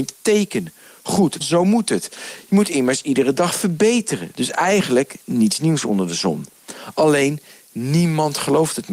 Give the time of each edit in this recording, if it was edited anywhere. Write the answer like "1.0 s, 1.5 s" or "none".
1.4 s